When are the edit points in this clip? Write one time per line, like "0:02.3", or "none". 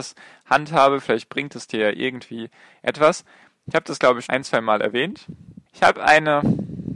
0:04.3
0:05.7

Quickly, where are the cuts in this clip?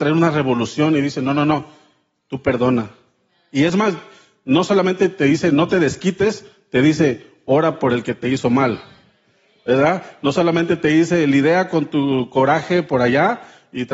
none

